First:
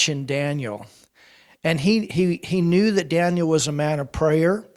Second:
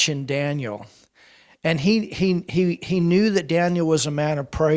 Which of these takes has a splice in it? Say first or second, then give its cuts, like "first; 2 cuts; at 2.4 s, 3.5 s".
first; 1 cut; at 2.1 s